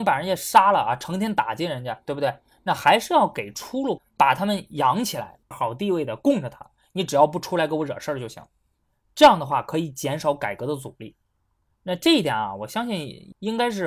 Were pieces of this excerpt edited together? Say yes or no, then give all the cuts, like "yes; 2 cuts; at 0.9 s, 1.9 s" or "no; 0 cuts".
yes; 2 cuts; at 4.0 s, 5.5 s